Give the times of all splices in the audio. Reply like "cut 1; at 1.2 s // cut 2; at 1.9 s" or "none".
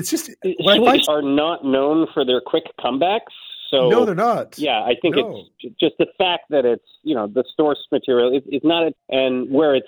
cut 1; at 1.0 s // cut 2; at 8.9 s